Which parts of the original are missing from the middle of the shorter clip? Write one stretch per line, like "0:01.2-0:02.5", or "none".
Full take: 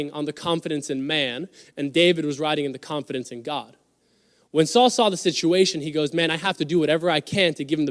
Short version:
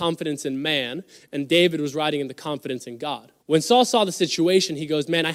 0:03.8-0:04.4

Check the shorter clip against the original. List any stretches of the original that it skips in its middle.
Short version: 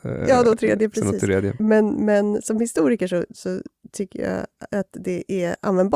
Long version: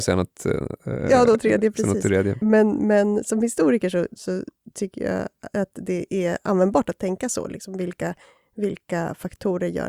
none

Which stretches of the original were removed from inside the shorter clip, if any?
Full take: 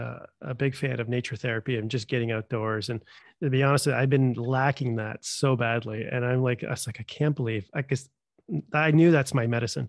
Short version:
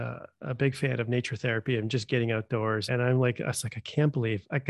0:02.9-0:06.1

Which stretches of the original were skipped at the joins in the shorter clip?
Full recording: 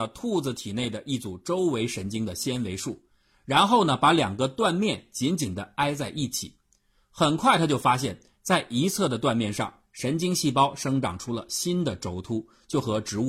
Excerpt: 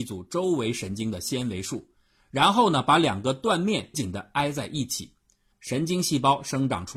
0:05.1-0:05.4
0:06.9-0:09.8

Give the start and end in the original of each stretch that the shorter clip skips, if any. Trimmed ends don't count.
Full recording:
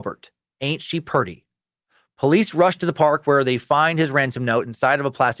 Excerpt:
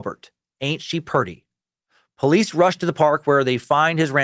none

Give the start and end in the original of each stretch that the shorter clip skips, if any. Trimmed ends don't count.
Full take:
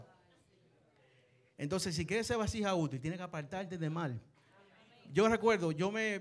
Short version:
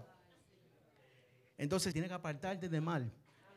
0:01.9-0:03.0

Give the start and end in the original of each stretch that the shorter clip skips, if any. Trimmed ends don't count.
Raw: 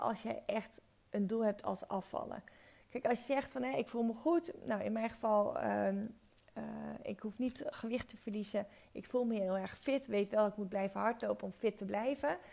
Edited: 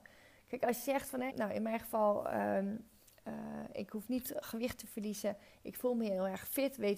0:03.7-0:04.6

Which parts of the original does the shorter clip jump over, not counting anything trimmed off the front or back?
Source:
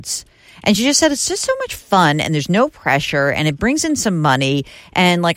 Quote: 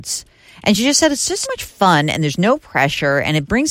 0:01.4-0:01.6

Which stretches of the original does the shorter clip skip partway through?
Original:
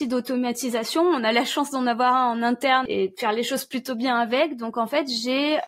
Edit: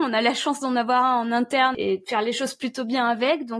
none

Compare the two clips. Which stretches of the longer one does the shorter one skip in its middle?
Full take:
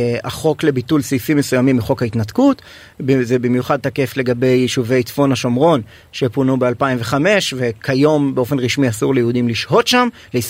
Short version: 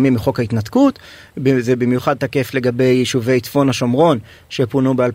none

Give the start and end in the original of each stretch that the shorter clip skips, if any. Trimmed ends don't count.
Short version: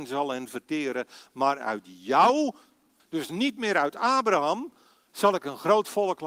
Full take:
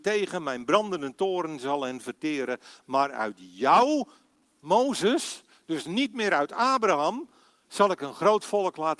0:04.5-0:05.6

